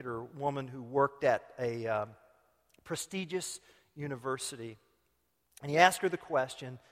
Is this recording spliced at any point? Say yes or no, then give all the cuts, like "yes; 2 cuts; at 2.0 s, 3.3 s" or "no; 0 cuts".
no; 0 cuts